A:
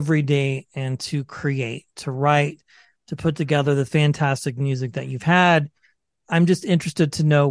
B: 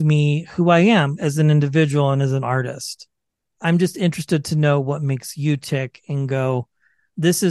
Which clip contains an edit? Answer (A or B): B